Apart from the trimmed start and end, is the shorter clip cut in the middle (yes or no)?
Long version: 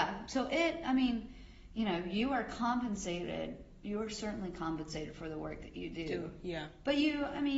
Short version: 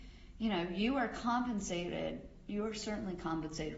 no